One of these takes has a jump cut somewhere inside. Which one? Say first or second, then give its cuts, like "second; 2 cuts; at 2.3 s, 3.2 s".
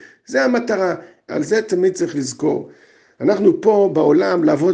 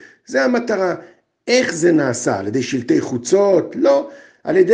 first; 1 cut; at 1.3 s